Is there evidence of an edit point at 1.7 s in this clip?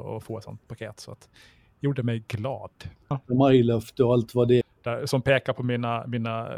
no; 2 cuts; at 3.1 s, 4.6 s

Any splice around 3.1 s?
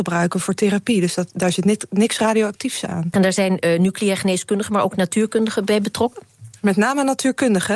yes; 1 cut; at 3.1 s

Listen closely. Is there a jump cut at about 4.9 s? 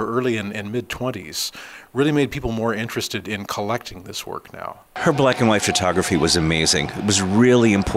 yes; 1 cut; at 4.9 s

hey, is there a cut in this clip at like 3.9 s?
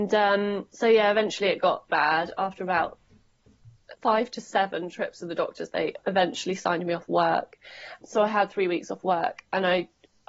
yes; 3 cuts; at 1.9 s, 3.9 s, 8.0 s

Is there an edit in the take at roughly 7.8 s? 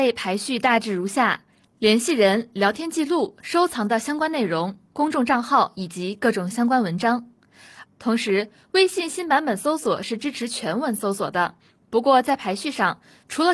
yes; 1 cut; at 7.8 s

